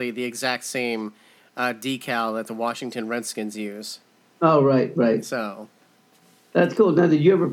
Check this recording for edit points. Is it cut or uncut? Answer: uncut